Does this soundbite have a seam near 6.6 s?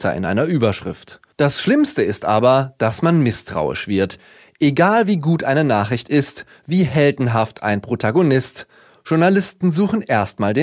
no; 0 cuts

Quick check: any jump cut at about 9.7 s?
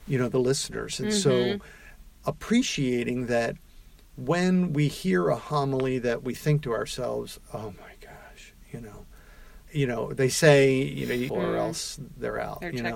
yes; 2 cuts; at 9.7 s, 11.3 s

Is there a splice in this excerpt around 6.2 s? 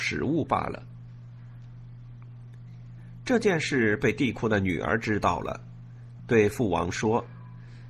yes; 1 cut; at 6.2 s

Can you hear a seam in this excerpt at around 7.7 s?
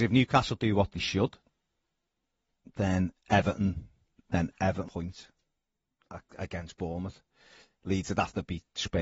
no; 1 cut; at 4.2 s

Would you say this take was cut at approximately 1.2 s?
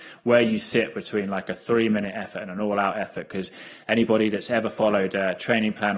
no; 0 cuts

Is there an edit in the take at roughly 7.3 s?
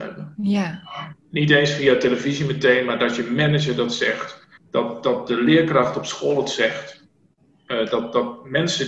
no; 1 cut; at 4.6 s

